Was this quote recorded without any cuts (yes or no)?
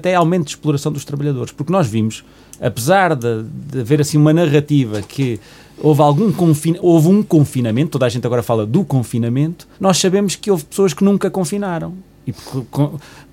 no